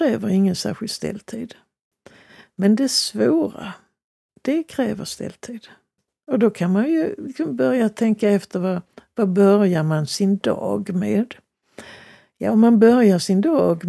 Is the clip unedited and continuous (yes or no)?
yes